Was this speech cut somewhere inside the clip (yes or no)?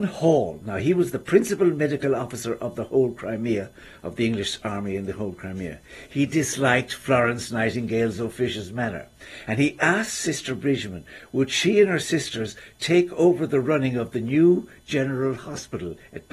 no